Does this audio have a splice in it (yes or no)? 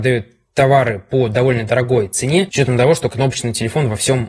yes